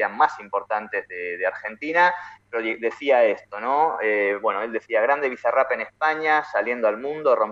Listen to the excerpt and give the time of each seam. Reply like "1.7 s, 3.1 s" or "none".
none

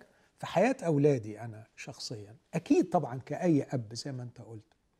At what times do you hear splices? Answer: 2.4 s

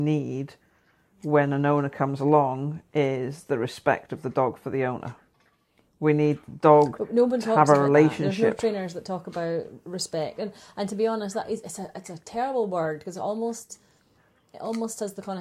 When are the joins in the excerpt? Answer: none

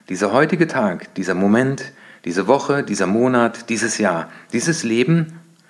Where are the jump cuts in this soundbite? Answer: none

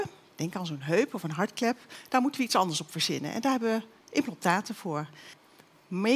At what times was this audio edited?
none

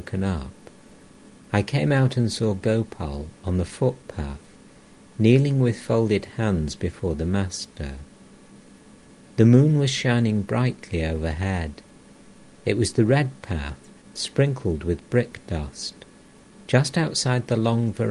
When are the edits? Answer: none

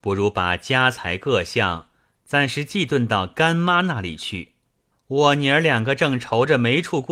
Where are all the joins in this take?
4.9 s

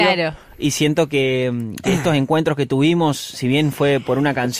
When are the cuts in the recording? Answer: 1.8 s

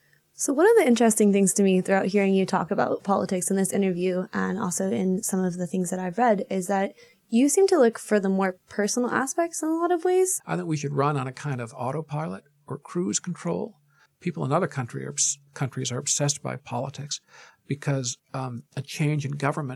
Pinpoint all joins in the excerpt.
10.4 s, 14.1 s

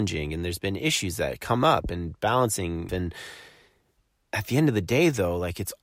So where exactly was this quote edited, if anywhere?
2.9 s

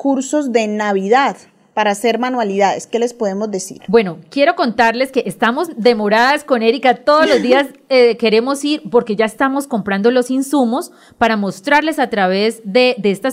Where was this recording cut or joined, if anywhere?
none

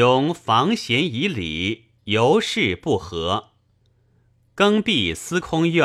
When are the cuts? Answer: 2.0 s, 3.8 s

